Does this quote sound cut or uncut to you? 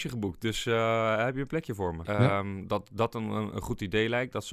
cut